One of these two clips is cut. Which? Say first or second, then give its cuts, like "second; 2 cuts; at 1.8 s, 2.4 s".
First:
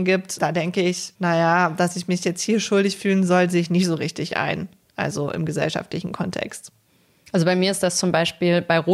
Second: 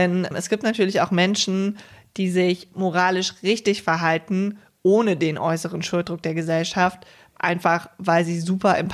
first; 1 cut; at 1.1 s